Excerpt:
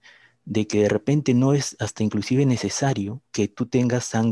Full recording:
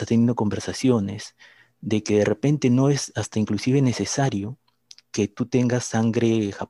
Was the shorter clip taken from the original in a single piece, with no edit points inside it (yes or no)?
no